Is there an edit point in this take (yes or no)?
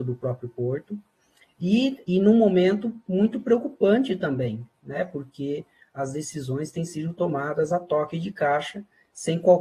yes